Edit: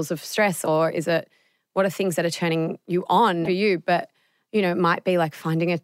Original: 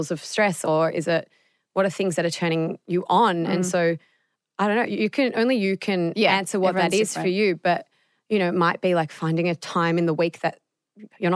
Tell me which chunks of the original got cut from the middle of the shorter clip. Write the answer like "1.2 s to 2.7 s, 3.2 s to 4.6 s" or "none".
3.5 s to 7.2 s